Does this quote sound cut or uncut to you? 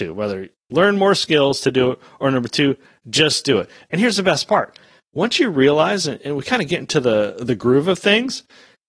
uncut